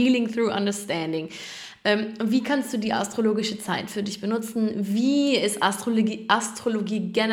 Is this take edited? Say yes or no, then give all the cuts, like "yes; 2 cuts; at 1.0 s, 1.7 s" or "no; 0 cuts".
no; 0 cuts